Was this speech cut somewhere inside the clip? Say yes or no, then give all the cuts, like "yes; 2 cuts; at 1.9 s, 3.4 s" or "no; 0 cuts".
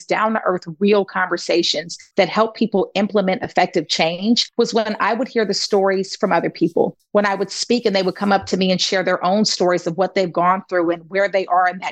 no; 0 cuts